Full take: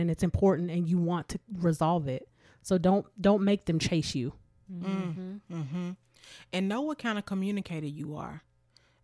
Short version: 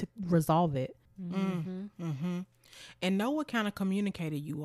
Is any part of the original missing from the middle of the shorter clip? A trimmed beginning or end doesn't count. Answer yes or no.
yes